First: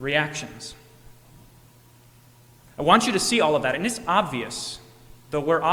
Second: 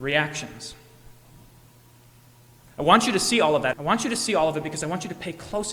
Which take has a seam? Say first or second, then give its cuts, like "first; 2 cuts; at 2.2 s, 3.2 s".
second; 1 cut; at 3.7 s